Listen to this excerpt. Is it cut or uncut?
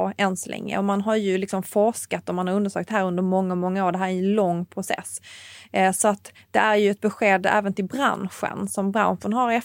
uncut